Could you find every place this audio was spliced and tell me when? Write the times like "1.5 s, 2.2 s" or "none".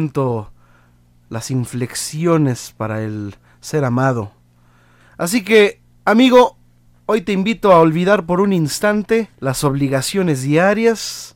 5.0 s, 6.9 s, 9.3 s